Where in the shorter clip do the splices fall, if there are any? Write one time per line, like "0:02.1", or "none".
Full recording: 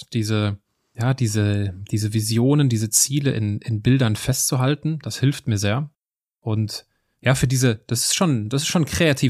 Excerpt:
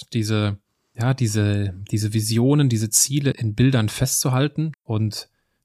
0:03.3
0:04.7